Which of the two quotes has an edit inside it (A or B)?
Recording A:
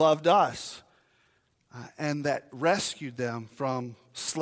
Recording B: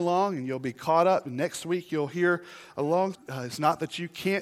B